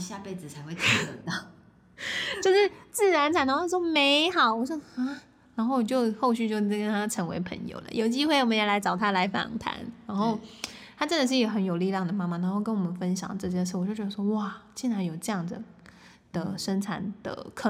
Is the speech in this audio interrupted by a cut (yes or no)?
no